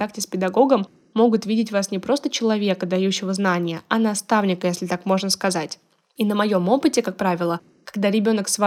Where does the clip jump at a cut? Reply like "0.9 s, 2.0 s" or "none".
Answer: none